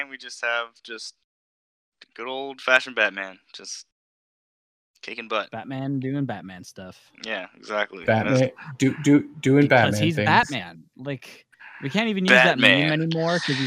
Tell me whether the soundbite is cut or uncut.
uncut